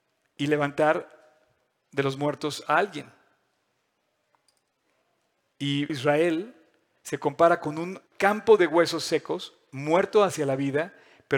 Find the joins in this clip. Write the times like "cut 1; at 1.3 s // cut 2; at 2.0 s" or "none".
cut 1; at 5.9 s // cut 2; at 8.1 s